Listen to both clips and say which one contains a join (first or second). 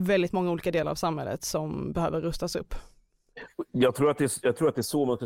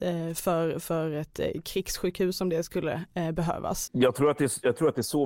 second